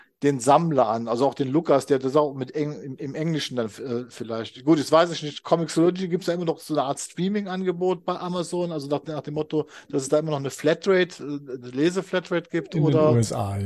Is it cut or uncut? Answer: uncut